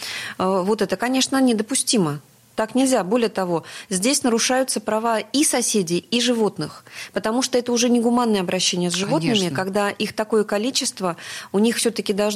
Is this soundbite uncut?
yes; 0 cuts

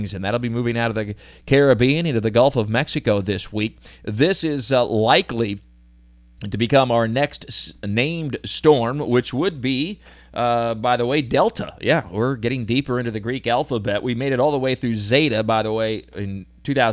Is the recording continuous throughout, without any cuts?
yes; 0 cuts

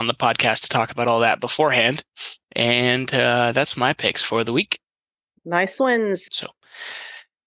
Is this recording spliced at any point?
yes; 2 cuts; at 2.4 s, 6.3 s

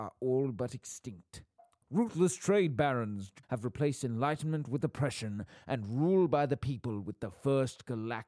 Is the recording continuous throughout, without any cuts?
no; 2 cuts; at 1.8 s, 3.4 s

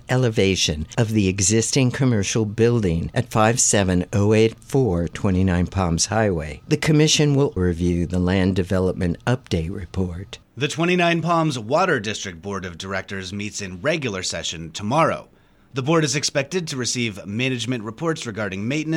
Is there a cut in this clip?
yes; 2 cuts; at 7.6 s, 10.4 s

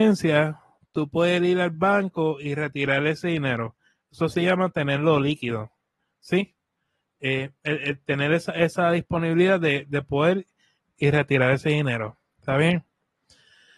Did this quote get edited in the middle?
no; 0 cuts

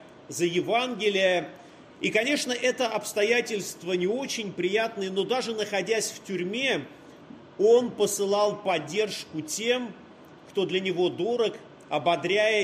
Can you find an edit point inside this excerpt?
no; 0 cuts

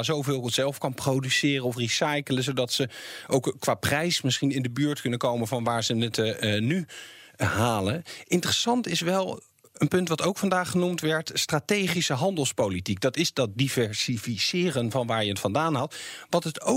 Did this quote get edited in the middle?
no; 0 cuts

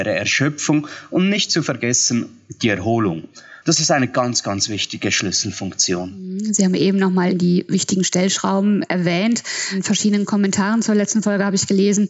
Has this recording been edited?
yes; 1 cut; at 3.6 s

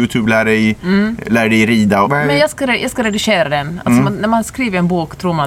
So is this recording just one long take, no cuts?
no; 1 cut; at 2.0 s

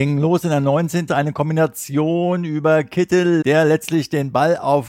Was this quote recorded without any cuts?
no; 2 cuts; at 1.1 s, 3.4 s

